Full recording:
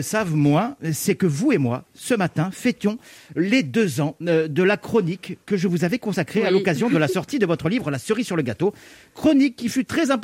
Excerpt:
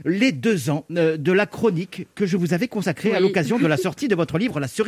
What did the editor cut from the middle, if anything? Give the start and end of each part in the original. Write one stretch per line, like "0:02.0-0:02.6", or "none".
none

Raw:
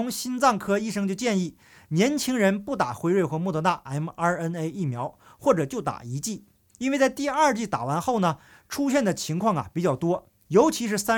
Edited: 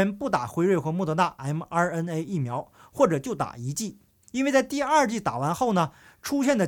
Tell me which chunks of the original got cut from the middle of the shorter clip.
none

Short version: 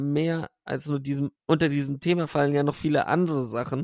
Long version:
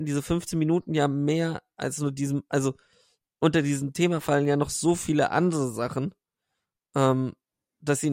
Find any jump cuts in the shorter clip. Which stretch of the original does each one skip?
0:02.5-0:03.3
0:04.7-0:05.0

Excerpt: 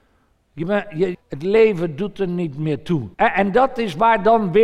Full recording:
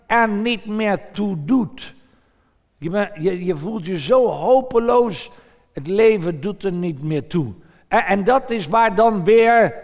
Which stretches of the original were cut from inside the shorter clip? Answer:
0:03.4-0:05.6
0:07.6-0:07.9

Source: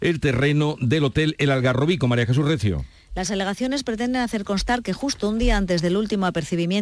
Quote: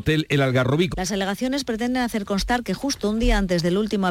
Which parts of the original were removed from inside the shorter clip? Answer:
0:02.0-0:03.1

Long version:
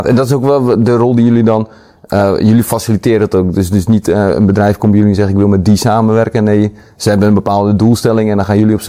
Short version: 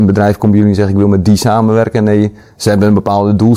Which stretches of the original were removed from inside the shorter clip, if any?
none

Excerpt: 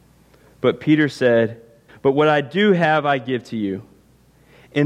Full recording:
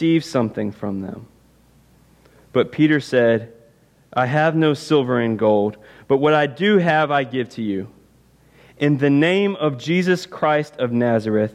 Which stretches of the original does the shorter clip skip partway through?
0:03.8-0:05.9

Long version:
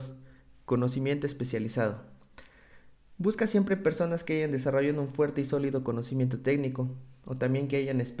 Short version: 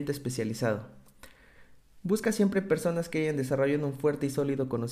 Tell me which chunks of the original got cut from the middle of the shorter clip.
none

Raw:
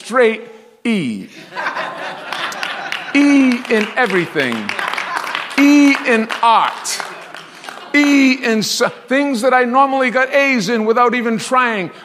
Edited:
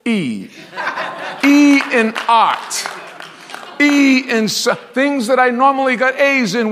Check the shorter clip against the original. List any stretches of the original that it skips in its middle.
0:02.2-0:05.5

